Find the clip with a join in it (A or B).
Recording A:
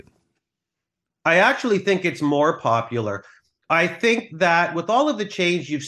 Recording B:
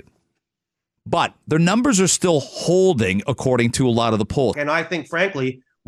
B